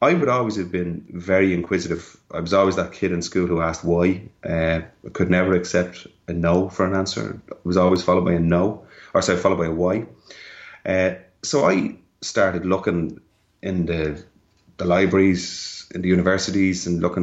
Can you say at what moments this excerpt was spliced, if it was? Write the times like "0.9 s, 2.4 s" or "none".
none